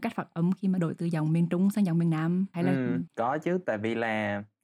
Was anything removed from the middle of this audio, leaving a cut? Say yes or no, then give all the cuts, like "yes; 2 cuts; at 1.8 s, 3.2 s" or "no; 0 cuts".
yes; 1 cut; at 3.1 s